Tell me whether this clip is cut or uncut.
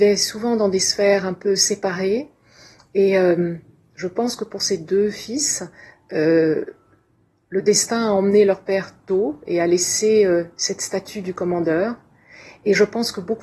uncut